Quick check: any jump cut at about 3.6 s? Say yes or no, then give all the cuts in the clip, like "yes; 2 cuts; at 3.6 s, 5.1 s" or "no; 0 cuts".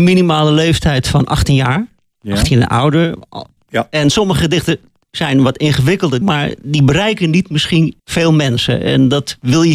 yes; 3 cuts; at 3.6 s, 6.2 s, 8.0 s